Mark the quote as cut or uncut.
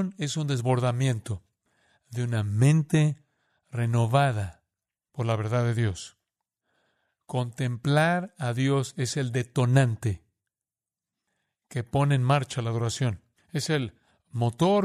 uncut